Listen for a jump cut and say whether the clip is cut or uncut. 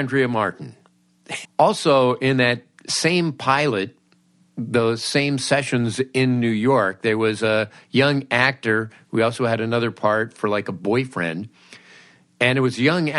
cut